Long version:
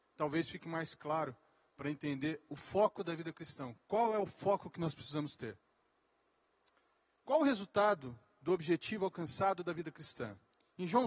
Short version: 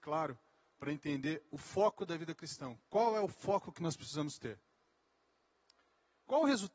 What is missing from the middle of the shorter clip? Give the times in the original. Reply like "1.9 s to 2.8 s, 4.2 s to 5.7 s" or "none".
none